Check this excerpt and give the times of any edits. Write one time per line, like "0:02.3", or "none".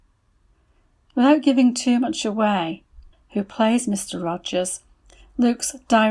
0:03.1